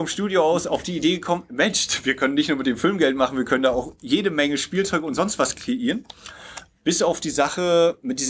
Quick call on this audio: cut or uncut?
cut